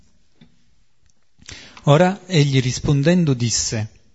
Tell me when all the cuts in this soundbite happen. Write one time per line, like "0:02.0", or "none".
none